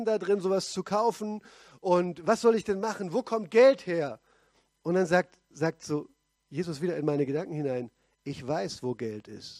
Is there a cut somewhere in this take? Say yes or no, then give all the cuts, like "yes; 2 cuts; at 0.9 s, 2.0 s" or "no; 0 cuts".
no; 0 cuts